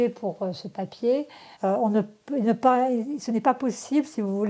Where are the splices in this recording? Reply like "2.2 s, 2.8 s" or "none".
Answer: 1.5 s